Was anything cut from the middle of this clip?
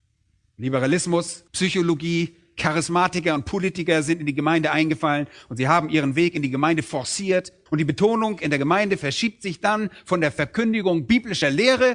yes; 2 cuts; at 1.5 s, 7.7 s

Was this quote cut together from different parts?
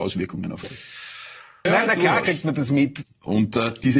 yes; 2 cuts; at 1.7 s, 3.0 s

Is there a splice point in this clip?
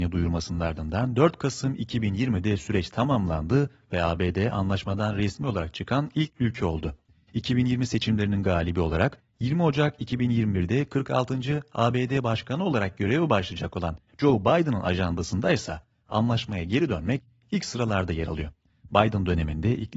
no; 0 cuts

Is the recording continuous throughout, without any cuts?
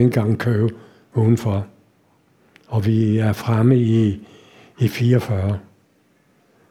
yes; 0 cuts

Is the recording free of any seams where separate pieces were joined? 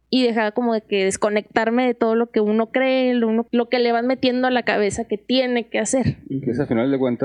no; 1 cut; at 3.5 s

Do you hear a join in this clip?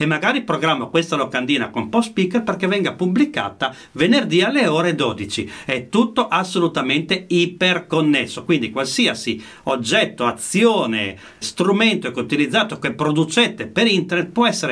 yes; 1 cut; at 11.4 s

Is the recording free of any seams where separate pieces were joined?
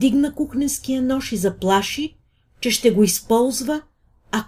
yes; 0 cuts

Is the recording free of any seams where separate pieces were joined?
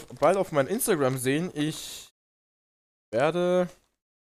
yes; 0 cuts

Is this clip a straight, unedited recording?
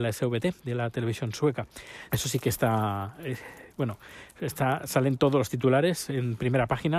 no; 1 cut; at 2.1 s

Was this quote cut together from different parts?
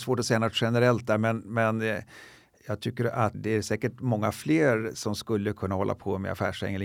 yes; 1 cut; at 3.3 s

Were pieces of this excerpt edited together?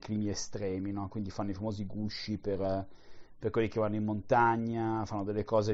no; 0 cuts

